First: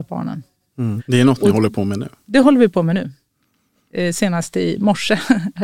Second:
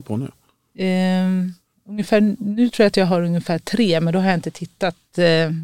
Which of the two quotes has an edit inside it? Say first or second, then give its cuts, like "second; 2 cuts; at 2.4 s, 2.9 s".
first; 1 cut; at 1.0 s